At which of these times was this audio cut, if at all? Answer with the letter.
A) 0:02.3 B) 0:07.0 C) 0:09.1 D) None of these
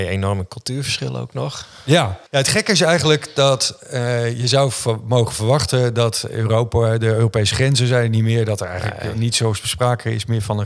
A